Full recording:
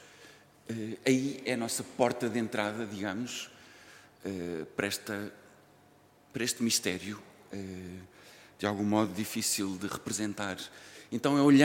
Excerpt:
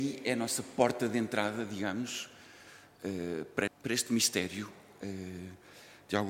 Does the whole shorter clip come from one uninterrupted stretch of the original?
no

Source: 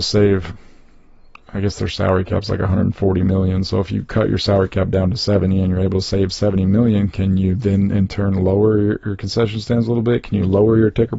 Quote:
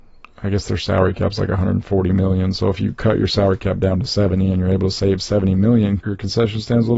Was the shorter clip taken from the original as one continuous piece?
no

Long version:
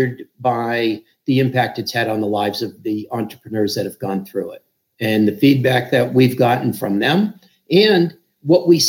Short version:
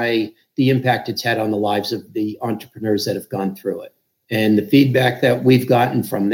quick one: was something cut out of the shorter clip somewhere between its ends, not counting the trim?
no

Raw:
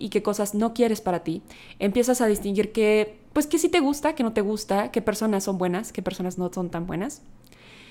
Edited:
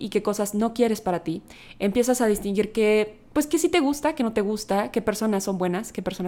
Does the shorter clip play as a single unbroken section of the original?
yes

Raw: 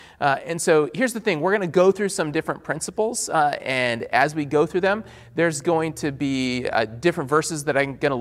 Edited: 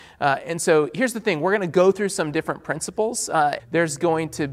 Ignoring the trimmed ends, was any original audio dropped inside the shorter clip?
yes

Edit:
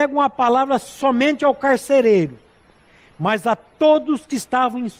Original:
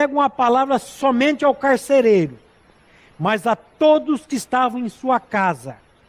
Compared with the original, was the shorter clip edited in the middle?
no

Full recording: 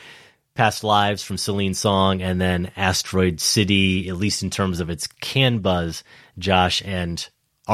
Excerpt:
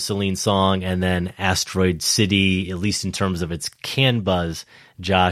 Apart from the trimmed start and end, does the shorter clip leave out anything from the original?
no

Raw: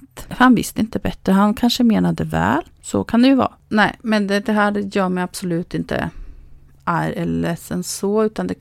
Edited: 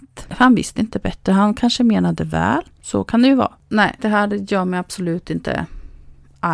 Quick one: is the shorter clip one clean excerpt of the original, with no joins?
no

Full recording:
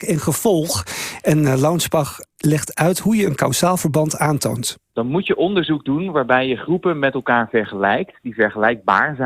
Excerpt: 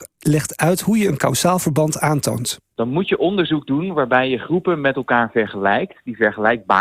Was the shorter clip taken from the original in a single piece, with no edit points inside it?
yes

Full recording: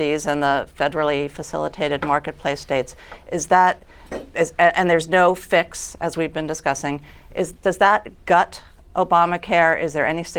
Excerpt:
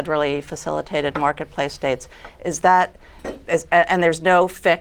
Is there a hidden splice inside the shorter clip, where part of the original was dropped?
no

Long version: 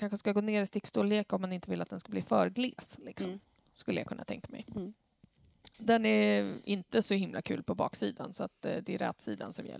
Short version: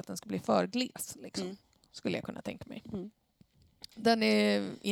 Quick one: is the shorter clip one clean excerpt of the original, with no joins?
yes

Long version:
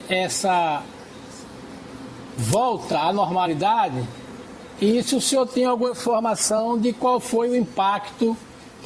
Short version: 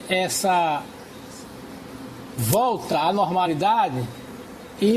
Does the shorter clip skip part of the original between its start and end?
no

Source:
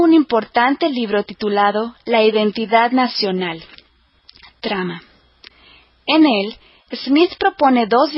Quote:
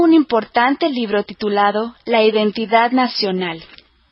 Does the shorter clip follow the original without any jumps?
yes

